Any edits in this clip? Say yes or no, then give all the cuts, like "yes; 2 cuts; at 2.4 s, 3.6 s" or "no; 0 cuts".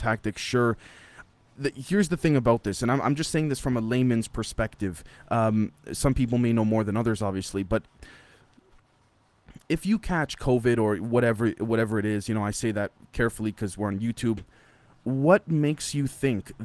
no; 0 cuts